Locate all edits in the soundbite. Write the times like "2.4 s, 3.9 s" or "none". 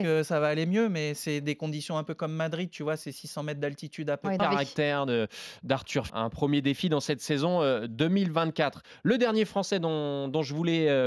4.4 s, 6.1 s